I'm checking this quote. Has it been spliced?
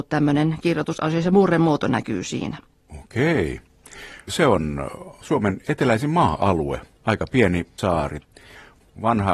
no; 0 cuts

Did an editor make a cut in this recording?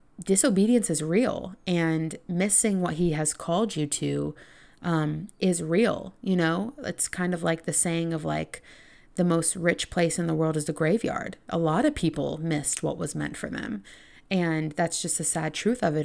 no; 0 cuts

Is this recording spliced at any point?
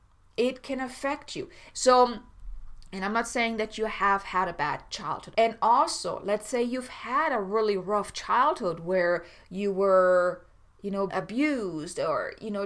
yes; 3 cuts; at 1.7 s, 5.3 s, 11.1 s

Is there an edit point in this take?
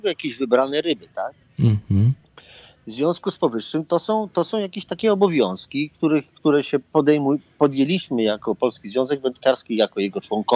no; 0 cuts

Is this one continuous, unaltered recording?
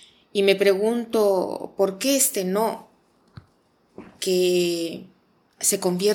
yes; 0 cuts

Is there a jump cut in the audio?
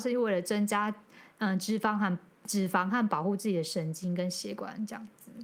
no; 0 cuts

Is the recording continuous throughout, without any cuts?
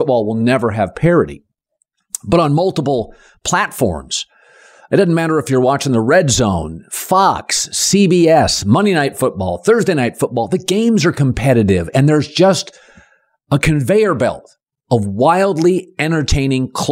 yes; 0 cuts

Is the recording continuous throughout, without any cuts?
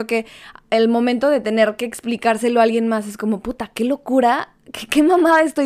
yes; 0 cuts

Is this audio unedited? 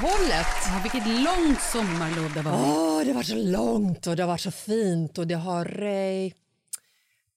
no; 1 cut; at 5.6 s

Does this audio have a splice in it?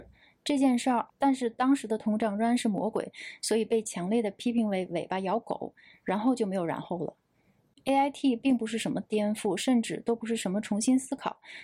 yes; 1 cut; at 1.1 s

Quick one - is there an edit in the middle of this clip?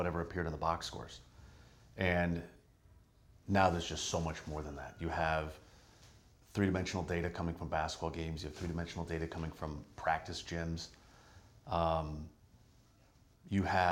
no; 0 cuts

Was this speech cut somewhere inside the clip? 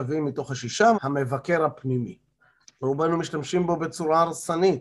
yes; 2 cuts; at 0.9 s, 2.6 s

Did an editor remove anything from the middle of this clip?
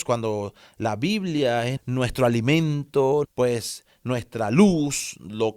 yes; 2 cuts; at 1.8 s, 3.2 s

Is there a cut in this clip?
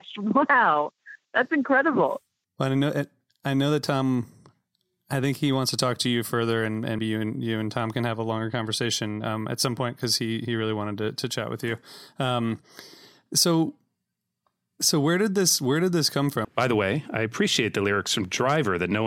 yes; 2 cuts; at 7.0 s, 16.4 s

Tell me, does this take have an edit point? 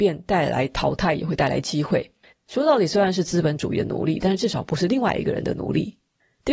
yes; 1 cut; at 2.3 s

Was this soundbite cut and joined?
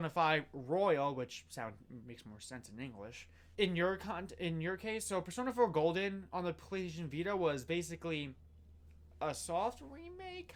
yes; 1 cut; at 3.6 s

